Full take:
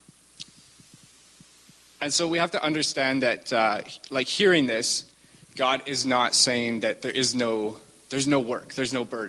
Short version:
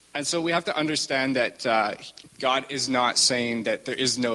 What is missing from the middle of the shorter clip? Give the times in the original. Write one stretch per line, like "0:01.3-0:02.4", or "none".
0:04.1-0:05.4